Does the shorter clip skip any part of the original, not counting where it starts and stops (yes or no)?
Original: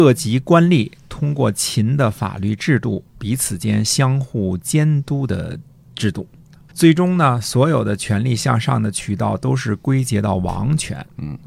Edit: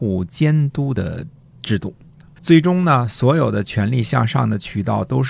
no